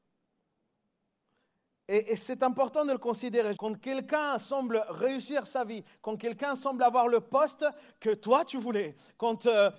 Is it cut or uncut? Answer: cut